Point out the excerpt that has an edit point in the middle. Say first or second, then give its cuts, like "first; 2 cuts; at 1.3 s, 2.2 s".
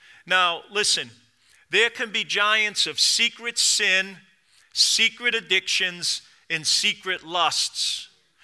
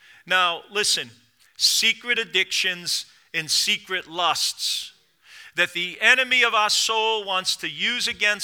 second; 1 cut; at 1.4 s